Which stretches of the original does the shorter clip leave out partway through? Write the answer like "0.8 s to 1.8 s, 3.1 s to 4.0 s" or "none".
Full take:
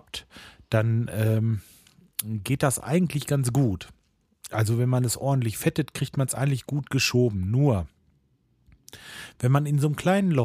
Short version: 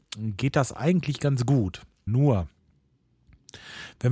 4.1 s to 7.5 s